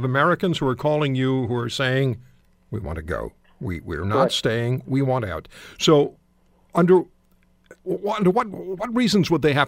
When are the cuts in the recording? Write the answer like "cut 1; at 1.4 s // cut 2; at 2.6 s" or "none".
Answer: cut 1; at 7.8 s